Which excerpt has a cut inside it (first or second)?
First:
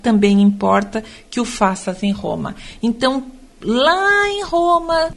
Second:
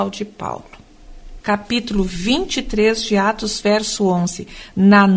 second